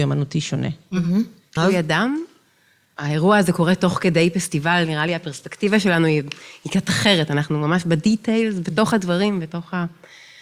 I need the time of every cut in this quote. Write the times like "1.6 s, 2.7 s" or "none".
1.6 s